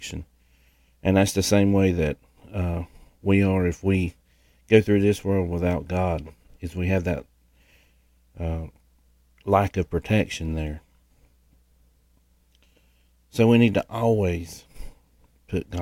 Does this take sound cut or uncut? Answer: uncut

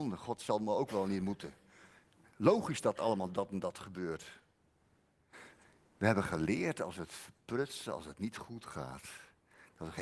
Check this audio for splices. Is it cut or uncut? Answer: uncut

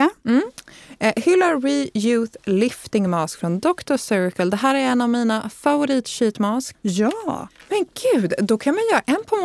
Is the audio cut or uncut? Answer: cut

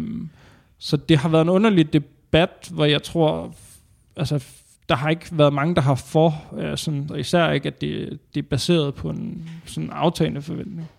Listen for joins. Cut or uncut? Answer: cut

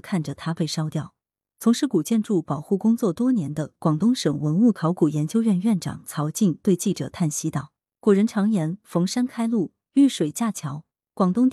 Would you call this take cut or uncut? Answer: uncut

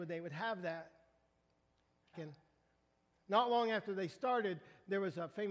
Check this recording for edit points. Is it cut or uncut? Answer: cut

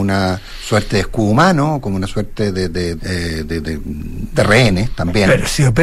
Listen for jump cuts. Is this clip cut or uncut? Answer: cut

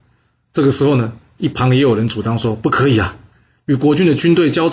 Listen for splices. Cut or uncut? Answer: uncut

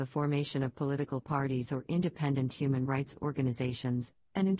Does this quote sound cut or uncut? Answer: uncut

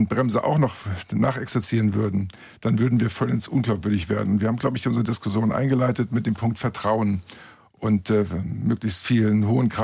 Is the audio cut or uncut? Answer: uncut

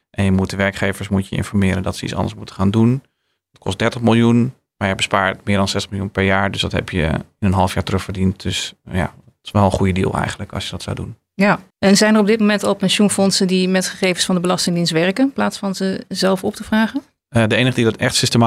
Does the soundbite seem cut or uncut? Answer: cut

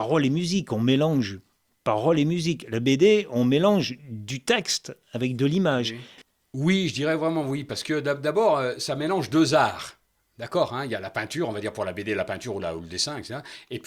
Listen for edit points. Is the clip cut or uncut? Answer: uncut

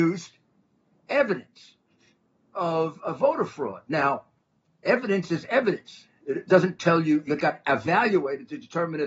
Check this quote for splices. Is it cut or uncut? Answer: uncut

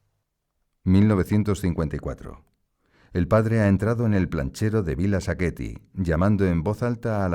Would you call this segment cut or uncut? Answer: uncut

